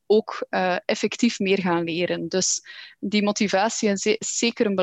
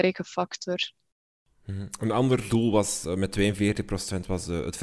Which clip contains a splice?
second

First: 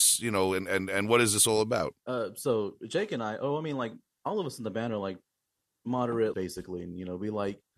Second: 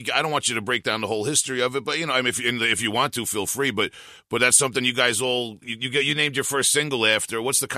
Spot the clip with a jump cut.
first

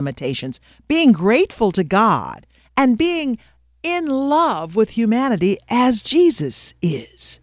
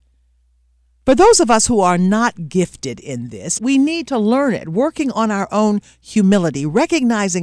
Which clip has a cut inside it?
second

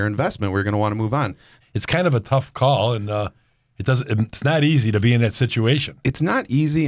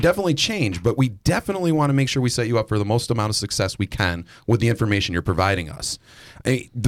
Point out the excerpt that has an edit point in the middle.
first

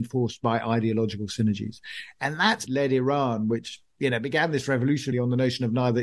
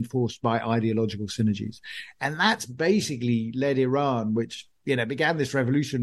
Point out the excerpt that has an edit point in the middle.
first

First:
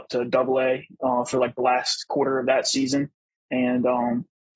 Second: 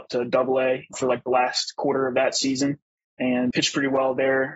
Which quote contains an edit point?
second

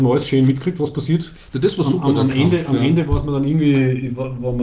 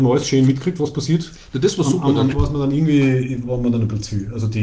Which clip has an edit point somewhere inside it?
second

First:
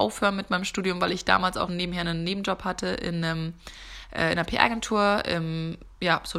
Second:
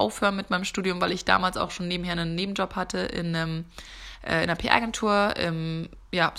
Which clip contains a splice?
first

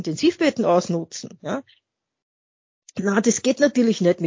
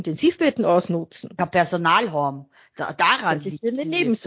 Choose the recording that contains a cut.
second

